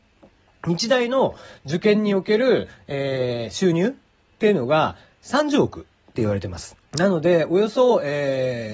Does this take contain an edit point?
yes; 1 cut; at 6.9 s

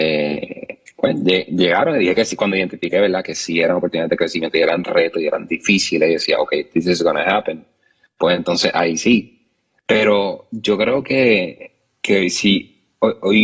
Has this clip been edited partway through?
no; 0 cuts

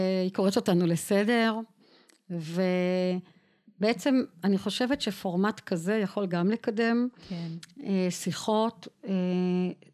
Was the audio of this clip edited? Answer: no; 0 cuts

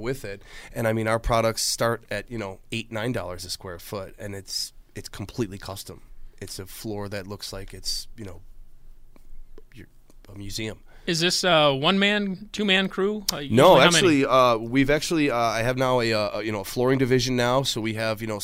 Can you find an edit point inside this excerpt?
yes; 1 cut; at 4.9 s

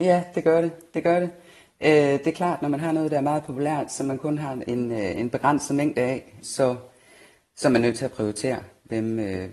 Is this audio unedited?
no; 1 cut; at 6.4 s

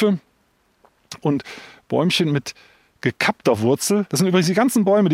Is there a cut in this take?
yes; 1 cut; at 1.2 s

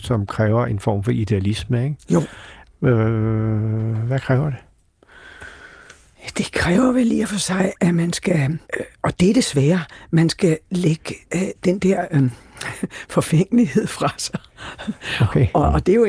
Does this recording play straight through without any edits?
no; 1 cut; at 8.7 s

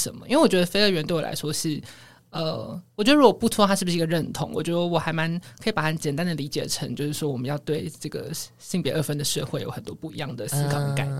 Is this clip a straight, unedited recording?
no; 1 cut; at 6.0 s

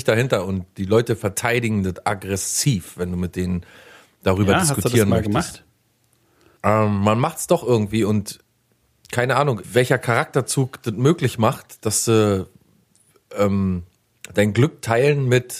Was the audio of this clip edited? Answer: yes; 2 cuts; at 6.6 s, 9.6 s

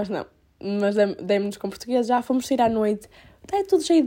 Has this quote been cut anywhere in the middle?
no; 0 cuts

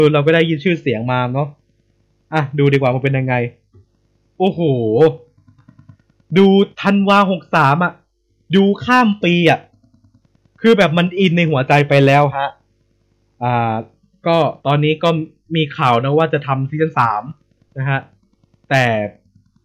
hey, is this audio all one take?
no; 2 cuts; at 6.7 s, 14.6 s

